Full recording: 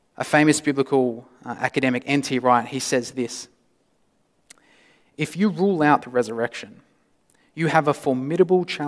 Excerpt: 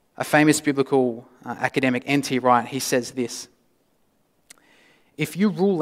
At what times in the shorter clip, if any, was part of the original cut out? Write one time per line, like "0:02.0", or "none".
none